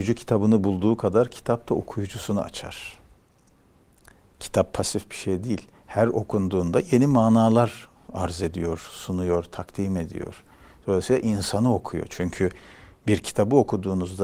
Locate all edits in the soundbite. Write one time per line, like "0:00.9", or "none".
none